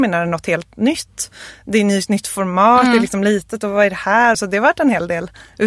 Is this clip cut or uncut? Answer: cut